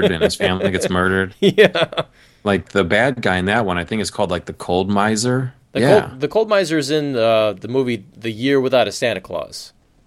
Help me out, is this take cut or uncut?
cut